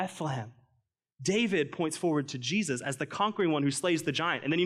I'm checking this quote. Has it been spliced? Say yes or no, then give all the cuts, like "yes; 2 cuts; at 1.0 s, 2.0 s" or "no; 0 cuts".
no; 0 cuts